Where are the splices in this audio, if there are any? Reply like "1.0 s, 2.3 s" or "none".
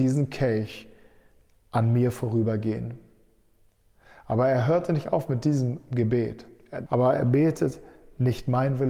6.9 s